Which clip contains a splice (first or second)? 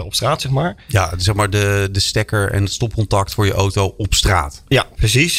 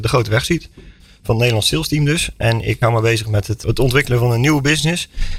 second